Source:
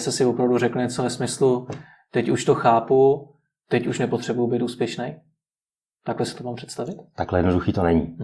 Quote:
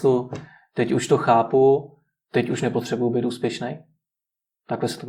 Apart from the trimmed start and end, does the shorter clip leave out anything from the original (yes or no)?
no